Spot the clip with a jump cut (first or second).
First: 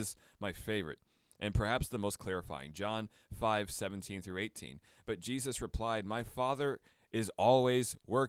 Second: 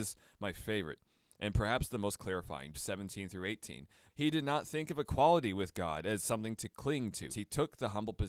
second